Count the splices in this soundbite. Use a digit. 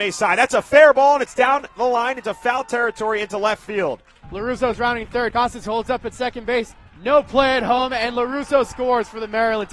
2